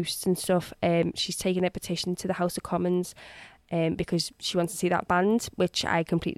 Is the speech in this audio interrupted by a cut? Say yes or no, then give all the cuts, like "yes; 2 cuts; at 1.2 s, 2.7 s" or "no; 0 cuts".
no; 0 cuts